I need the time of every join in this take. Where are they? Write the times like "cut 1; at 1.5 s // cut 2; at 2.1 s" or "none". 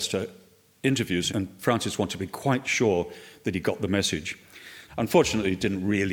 cut 1; at 1.3 s // cut 2; at 4.9 s